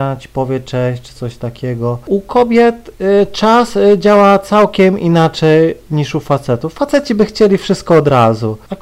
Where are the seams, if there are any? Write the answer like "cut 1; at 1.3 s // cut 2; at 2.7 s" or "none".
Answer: none